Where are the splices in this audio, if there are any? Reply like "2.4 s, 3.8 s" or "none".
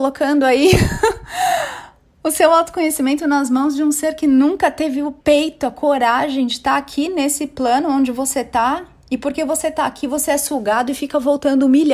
5.2 s